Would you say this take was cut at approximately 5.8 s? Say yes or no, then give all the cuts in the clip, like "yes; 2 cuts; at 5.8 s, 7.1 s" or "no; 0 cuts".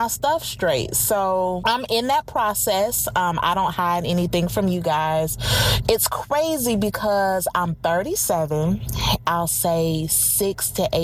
yes; 2 cuts; at 5.8 s, 9.2 s